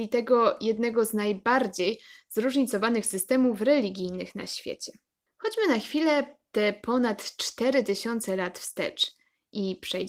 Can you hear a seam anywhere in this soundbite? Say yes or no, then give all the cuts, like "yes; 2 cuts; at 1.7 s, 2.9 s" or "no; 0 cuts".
yes; 1 cut; at 5.3 s